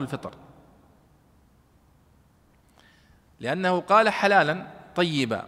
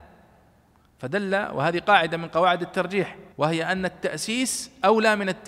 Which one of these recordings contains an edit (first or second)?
second